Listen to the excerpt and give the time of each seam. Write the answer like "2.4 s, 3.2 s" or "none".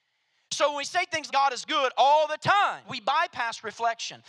1.3 s, 2.8 s